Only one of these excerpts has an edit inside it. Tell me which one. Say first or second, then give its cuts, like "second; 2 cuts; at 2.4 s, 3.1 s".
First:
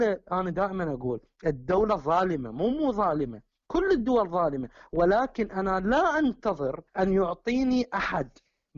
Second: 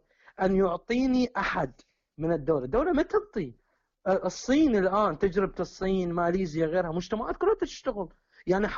first; 1 cut; at 6.9 s